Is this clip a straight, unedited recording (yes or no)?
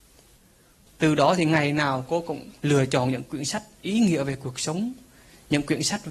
no